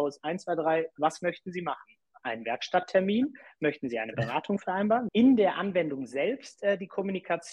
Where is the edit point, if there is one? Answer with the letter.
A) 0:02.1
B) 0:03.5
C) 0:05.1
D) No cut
C